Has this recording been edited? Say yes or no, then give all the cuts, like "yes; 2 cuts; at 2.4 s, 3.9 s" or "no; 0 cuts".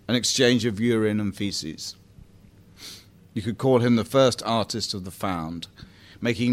yes; 1 cut; at 3.2 s